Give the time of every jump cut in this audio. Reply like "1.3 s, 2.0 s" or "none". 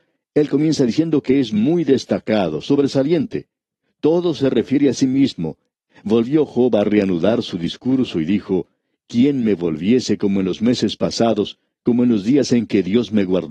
5.9 s